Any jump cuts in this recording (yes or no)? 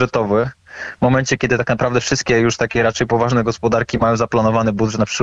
no